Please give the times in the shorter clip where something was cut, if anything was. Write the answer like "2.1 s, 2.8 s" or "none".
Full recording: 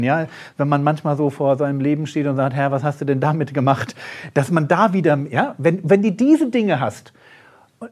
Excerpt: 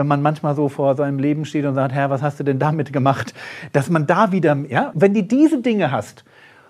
4.9 s